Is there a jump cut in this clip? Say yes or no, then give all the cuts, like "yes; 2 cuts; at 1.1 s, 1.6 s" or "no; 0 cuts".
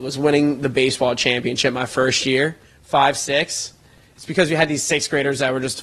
no; 0 cuts